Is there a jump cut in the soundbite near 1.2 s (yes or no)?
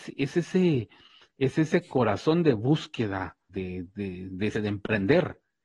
no